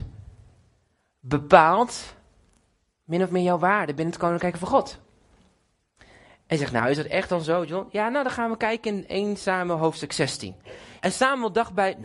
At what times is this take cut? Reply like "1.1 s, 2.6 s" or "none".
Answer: 11.0 s